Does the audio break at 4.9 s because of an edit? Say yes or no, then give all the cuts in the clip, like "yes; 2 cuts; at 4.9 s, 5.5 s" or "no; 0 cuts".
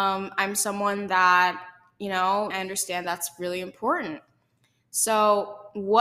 no; 1 cut; at 2.5 s